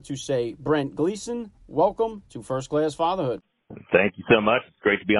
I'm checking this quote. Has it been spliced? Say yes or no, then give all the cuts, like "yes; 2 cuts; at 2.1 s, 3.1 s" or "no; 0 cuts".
no; 0 cuts